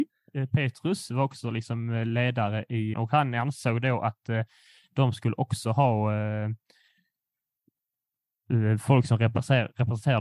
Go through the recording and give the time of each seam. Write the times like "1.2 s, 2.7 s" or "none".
2.9 s